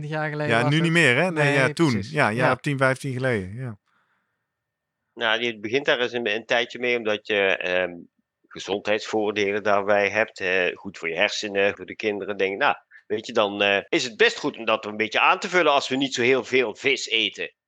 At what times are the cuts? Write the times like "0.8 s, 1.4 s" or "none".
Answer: 11.7 s, 13.9 s